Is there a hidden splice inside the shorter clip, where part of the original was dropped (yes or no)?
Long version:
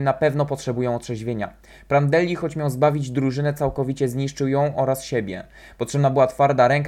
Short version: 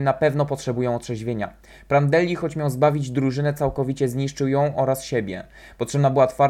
no